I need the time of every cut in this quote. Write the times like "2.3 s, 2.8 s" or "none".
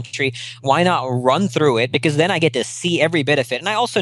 none